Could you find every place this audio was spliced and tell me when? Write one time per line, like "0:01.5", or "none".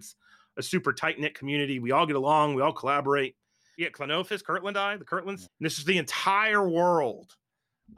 0:03.8
0:05.5